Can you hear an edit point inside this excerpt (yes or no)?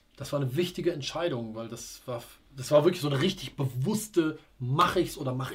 no